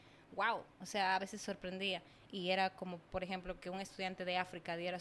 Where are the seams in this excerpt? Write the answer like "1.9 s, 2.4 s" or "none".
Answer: 2.3 s